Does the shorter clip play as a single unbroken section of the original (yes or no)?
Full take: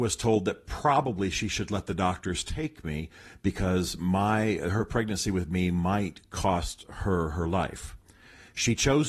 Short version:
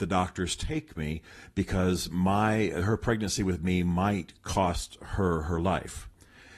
yes